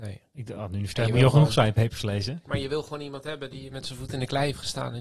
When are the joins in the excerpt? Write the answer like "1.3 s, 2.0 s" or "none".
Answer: 2.4 s